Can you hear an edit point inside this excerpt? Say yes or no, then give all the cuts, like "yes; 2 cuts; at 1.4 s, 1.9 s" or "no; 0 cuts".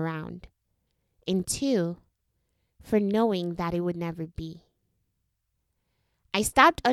no; 0 cuts